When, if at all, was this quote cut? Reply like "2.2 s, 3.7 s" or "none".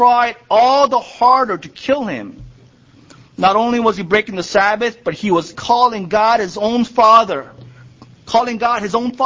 5.5 s